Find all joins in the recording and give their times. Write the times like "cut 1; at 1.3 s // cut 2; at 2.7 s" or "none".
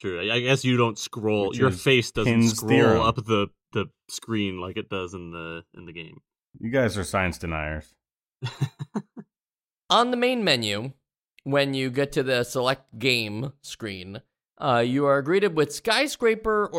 none